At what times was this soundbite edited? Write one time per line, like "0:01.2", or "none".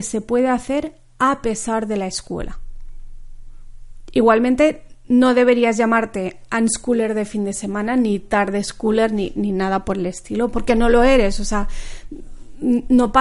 0:10.5